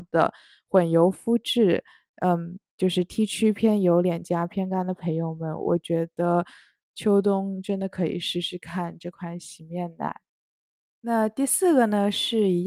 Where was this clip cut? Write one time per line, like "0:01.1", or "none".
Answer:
none